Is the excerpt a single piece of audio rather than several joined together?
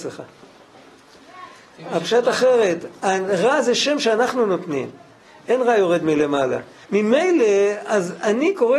no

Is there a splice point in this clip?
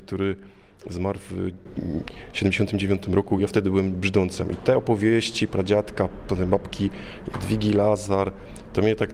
no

